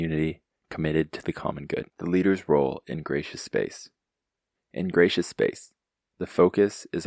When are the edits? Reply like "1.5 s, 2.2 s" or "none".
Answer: 1.9 s, 4.6 s